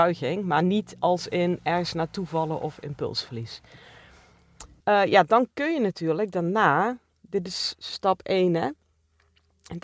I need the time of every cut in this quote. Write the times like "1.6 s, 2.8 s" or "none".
4.8 s